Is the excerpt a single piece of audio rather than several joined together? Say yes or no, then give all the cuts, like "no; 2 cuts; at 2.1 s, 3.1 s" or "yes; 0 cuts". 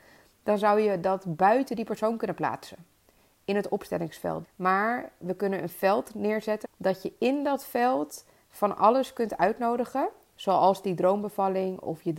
no; 2 cuts; at 4.4 s, 6.6 s